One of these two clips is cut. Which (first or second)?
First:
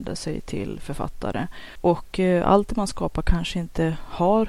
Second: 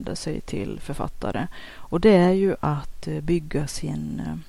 first